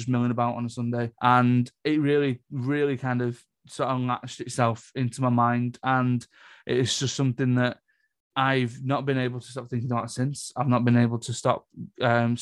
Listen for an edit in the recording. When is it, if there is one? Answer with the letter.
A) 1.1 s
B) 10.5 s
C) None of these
A